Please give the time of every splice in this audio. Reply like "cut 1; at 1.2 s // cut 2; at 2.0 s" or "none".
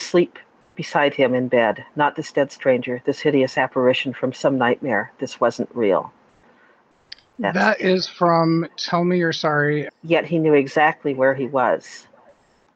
cut 1; at 9.9 s